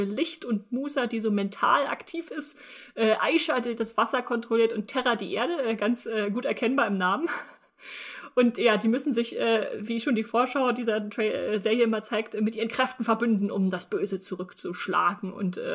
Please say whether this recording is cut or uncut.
uncut